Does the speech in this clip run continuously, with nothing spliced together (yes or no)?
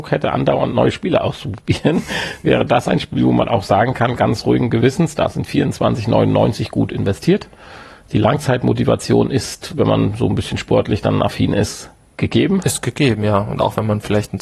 yes